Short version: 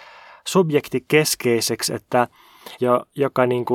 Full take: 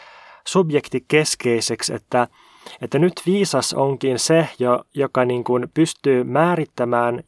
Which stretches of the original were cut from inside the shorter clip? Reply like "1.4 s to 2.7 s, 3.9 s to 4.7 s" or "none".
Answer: 2.8 s to 4.6 s